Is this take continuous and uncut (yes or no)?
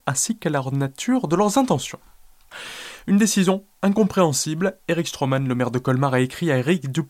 yes